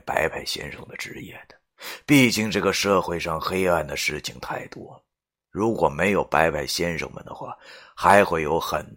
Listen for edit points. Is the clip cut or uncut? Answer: uncut